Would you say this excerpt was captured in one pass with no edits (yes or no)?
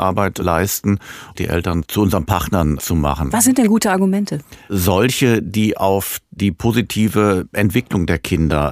no